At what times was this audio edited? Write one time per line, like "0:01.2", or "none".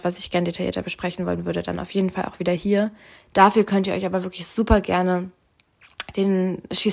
0:03.1